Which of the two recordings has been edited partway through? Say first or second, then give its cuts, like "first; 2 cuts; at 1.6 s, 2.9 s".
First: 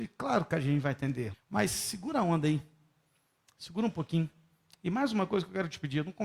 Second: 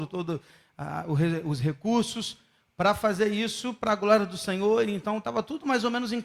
first; 1 cut; at 1.3 s